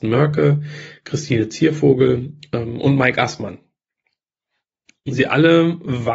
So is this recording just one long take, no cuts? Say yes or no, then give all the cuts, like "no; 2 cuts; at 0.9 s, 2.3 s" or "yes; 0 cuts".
yes; 0 cuts